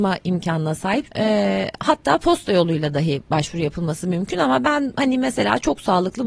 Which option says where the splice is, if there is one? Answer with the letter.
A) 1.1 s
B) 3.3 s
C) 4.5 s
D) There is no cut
A